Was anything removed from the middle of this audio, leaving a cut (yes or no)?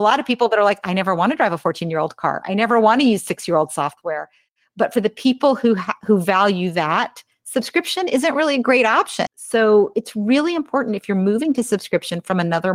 yes